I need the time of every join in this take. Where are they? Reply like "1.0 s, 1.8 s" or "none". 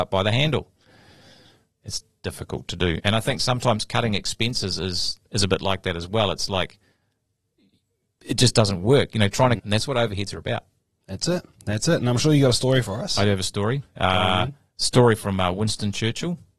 9.6 s